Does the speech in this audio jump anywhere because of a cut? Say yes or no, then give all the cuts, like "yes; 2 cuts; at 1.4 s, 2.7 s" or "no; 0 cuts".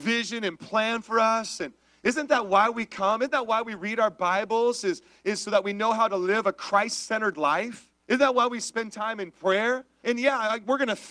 yes; 2 cuts; at 8.0 s, 10.0 s